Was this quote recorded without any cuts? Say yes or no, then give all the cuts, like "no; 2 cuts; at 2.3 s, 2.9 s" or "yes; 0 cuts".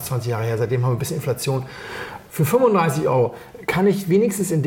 yes; 0 cuts